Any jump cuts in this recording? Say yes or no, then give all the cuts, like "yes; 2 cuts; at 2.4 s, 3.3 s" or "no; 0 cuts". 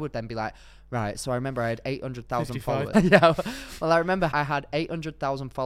yes; 2 cuts; at 2.9 s, 4.3 s